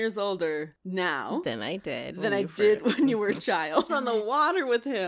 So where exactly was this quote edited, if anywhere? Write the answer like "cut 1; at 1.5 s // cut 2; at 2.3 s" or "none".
cut 1; at 3.9 s

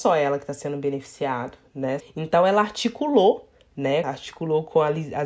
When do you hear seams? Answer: cut 1; at 2.0 s // cut 2; at 4.0 s

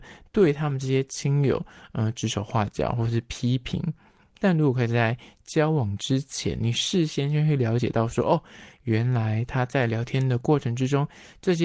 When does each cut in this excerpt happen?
none

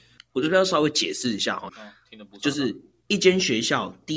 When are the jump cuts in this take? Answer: cut 1; at 1.7 s

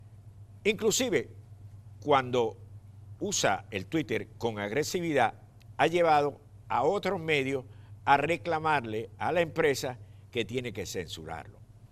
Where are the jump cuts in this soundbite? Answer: none

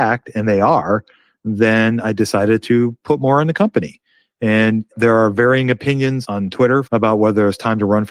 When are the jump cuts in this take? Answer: cut 1; at 6.8 s

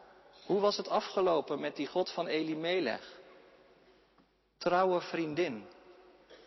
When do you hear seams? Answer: cut 1; at 4.5 s

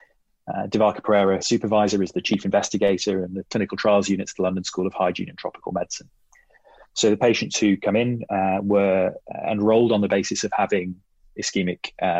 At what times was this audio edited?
cut 1; at 1.4 s

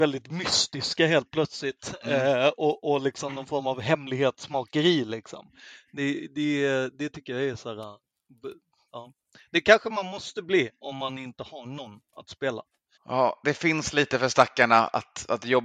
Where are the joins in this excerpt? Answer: cut 1; at 8.9 s // cut 2; at 12.9 s

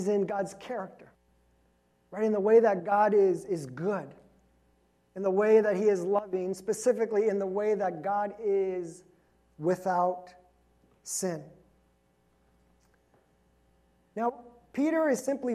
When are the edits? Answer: none

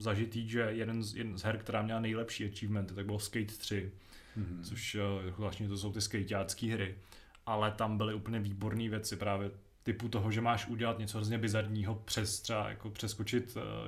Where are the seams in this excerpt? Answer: none

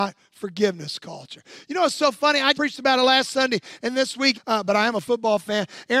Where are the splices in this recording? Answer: cut 1; at 2.5 s // cut 2; at 4.3 s

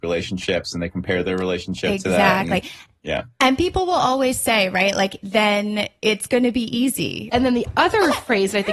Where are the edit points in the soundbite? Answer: cut 1; at 5.2 s // cut 2; at 7.3 s

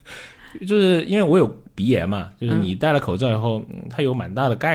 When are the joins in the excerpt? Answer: none

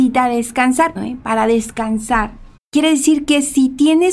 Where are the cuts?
cut 1; at 1.0 s // cut 2; at 2.6 s

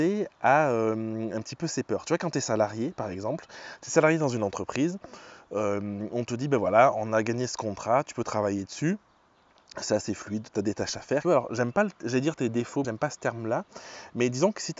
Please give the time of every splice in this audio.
cut 1; at 11.2 s // cut 2; at 12.8 s

